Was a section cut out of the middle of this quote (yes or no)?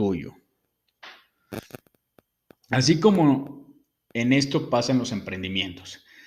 no